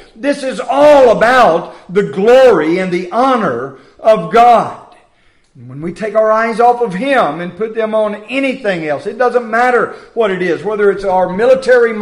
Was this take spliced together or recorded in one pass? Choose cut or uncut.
uncut